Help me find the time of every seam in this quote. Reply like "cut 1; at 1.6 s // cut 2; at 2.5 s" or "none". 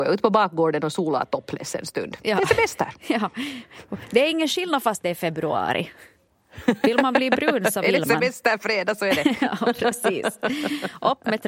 none

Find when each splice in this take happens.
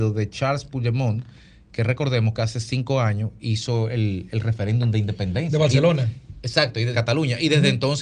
cut 1; at 6.9 s

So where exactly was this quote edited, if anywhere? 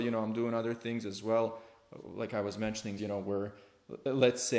cut 1; at 3.0 s

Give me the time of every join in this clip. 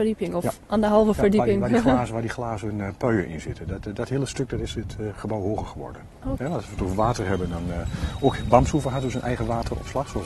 cut 1; at 6.4 s

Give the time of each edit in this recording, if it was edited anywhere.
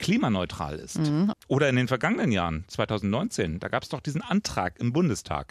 cut 1; at 1.3 s

